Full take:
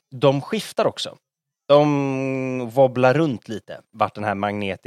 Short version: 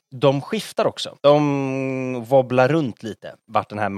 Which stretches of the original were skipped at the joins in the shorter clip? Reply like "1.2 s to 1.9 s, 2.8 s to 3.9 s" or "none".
1.2 s to 1.6 s